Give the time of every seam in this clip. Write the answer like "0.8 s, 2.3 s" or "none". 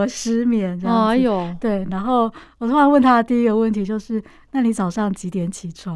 none